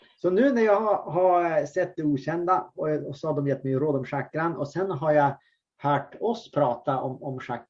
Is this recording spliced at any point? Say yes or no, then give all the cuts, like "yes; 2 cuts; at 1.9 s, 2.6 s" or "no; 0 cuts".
no; 0 cuts